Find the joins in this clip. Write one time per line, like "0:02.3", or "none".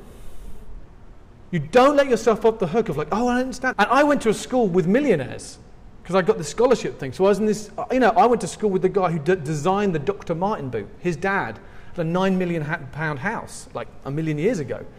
0:03.7